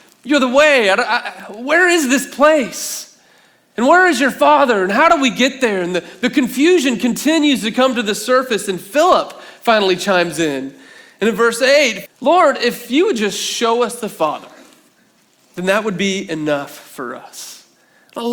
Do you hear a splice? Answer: yes; 2 cuts; at 12.1 s, 15.4 s

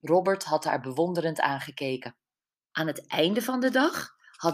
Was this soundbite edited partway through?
yes; 1 cut; at 2.7 s

